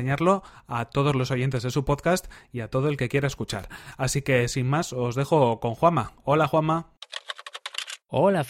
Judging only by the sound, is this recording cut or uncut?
uncut